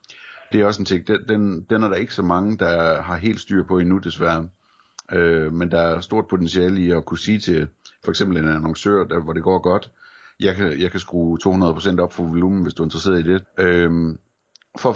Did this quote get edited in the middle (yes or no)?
yes